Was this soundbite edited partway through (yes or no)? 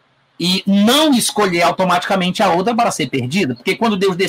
no